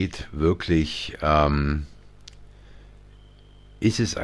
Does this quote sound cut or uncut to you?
uncut